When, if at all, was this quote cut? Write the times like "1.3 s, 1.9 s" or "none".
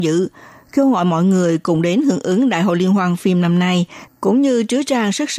4.1 s